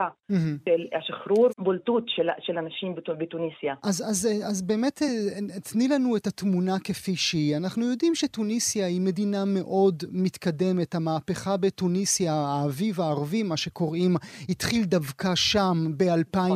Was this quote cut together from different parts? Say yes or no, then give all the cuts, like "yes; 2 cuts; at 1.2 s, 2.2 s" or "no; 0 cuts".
yes; 1 cut; at 1.5 s